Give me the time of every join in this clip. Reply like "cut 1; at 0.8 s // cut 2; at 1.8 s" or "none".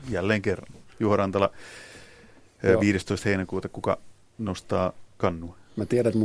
none